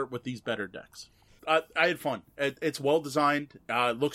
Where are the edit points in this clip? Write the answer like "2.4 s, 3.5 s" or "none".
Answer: 1.4 s